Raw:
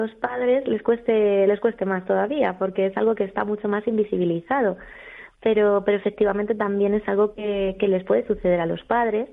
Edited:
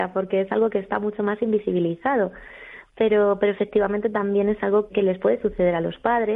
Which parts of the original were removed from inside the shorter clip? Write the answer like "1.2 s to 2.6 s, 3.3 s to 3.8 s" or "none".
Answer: 7.3 s to 7.7 s

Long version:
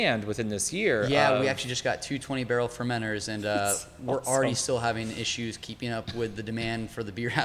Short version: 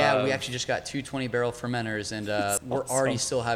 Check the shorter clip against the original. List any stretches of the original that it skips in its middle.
3.7 s to 3.9 s

